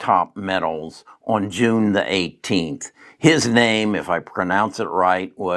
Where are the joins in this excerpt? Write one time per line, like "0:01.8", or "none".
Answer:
none